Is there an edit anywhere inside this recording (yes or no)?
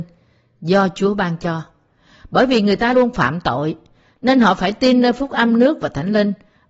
yes